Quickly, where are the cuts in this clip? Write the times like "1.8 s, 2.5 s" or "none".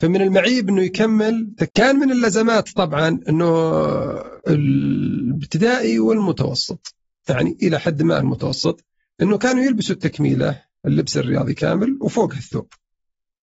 1.7 s, 4.4 s